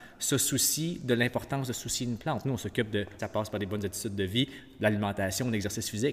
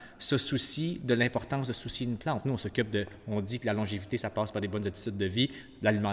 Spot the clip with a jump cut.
first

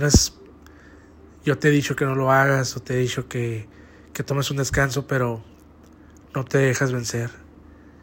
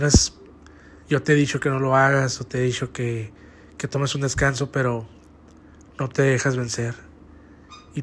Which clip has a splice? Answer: second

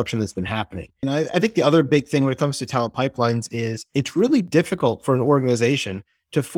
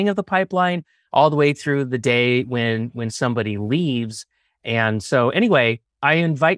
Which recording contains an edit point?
first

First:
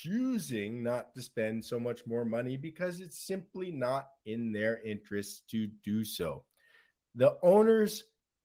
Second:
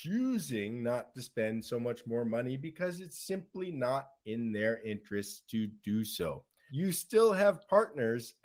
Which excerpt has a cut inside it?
second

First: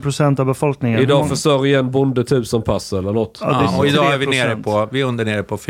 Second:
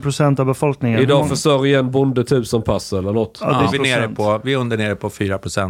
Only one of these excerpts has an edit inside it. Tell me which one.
second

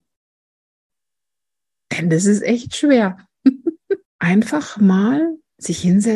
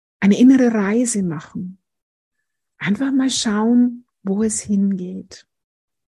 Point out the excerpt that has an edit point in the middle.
first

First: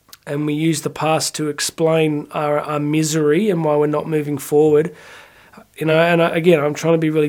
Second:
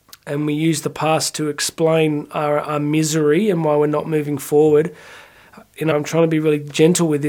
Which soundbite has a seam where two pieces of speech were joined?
second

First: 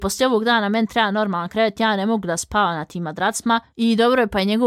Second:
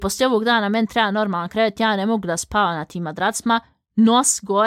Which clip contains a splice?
first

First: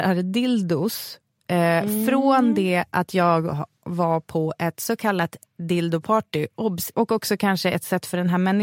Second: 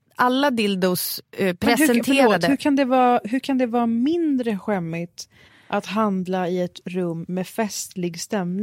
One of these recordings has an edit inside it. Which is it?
first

